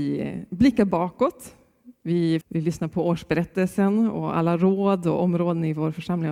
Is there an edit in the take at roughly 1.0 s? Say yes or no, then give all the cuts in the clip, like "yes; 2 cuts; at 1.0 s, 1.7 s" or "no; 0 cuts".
no; 1 cut; at 2.4 s